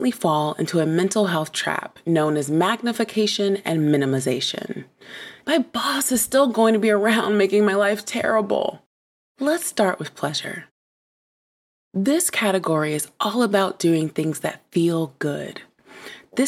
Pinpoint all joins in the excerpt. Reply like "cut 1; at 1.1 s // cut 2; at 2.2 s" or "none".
cut 1; at 5.4 s // cut 2; at 9.3 s